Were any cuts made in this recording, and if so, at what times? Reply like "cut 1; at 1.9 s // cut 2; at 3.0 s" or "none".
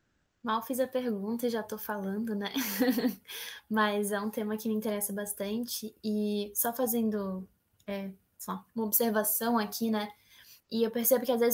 cut 1; at 10.6 s